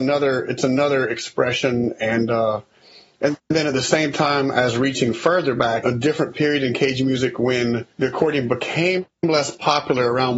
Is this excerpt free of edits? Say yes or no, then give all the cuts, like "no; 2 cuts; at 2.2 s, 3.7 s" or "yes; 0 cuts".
no; 2 cuts; at 5.8 s, 7.9 s